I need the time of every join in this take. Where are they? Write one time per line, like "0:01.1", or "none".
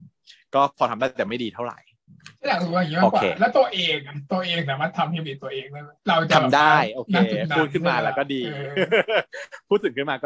0:02.4
0:06.0